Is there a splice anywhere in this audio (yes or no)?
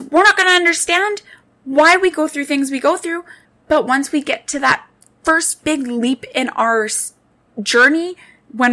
no